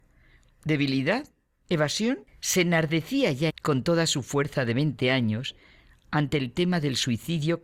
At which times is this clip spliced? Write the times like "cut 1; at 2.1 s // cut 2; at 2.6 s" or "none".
cut 1; at 2.3 s // cut 2; at 3.5 s

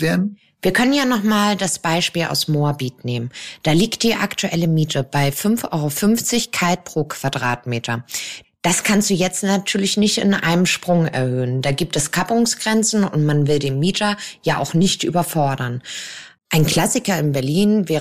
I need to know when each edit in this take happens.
cut 1; at 8.4 s // cut 2; at 16.4 s

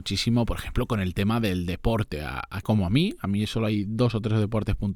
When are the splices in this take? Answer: cut 1; at 2.6 s

